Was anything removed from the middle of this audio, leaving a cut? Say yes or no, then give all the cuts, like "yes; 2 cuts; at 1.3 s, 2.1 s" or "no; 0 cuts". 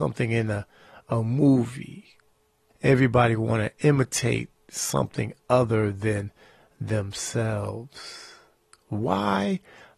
yes; 1 cut; at 2.7 s